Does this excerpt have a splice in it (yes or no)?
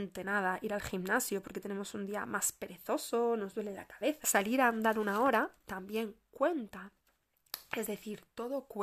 yes